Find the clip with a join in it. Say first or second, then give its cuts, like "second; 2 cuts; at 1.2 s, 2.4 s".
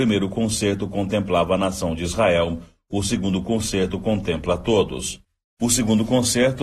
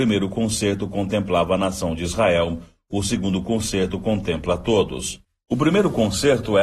first; 1 cut; at 5.4 s